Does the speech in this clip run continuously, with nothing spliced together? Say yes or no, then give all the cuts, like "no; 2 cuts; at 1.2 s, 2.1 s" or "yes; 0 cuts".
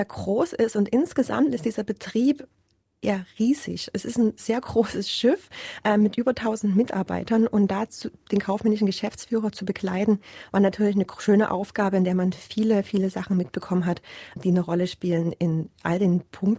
no; 1 cut; at 14.4 s